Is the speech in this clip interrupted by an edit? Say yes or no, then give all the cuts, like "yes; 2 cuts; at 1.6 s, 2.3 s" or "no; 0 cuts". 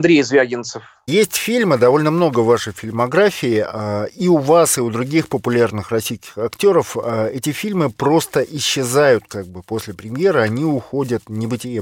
no; 0 cuts